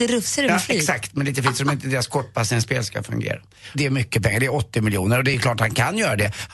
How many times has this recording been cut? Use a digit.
1